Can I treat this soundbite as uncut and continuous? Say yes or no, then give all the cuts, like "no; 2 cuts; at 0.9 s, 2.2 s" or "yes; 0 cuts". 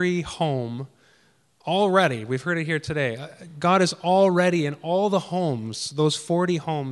yes; 0 cuts